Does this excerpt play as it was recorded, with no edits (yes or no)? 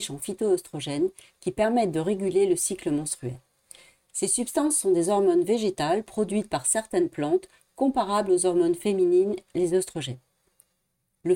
yes